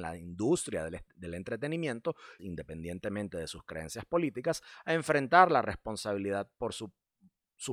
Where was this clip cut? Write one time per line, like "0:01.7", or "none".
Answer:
0:02.4

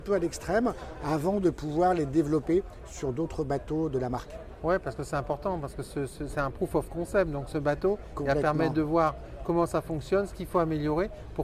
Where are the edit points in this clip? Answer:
none

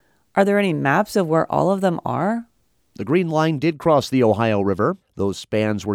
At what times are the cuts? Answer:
0:05.0

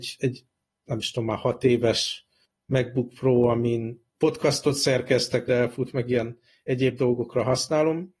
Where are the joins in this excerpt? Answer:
0:04.1
0:05.5

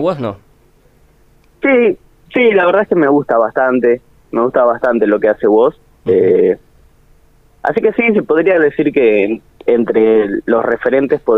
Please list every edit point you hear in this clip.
none

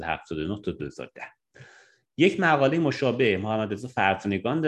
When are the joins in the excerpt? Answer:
none

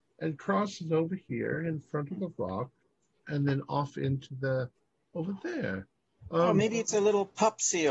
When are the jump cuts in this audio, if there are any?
0:03.2

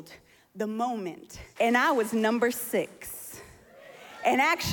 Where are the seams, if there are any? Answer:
0:01.6

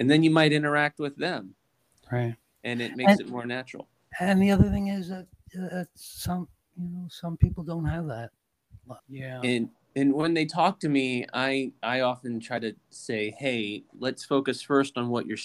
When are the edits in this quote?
0:09.0

